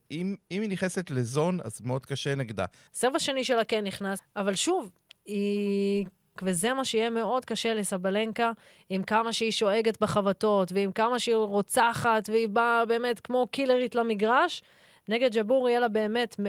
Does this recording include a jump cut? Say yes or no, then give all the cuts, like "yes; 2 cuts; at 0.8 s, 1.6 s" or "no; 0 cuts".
yes; 3 cuts; at 2.9 s, 4.2 s, 6.4 s